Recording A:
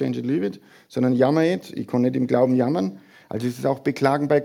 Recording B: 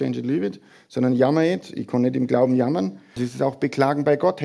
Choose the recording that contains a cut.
B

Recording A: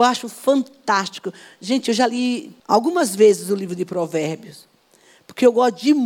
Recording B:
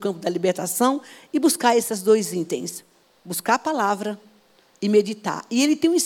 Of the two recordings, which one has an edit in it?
A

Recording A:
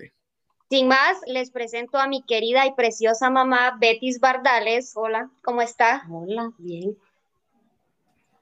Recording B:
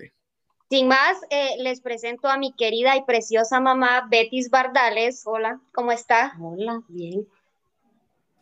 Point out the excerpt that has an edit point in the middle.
A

